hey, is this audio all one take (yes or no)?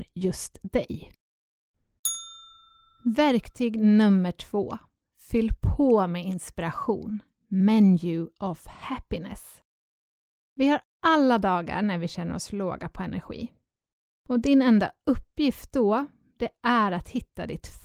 yes